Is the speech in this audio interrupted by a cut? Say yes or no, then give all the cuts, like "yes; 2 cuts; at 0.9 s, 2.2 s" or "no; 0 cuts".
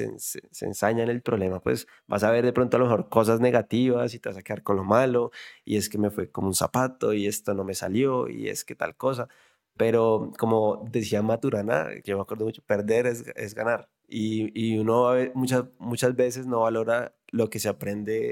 no; 0 cuts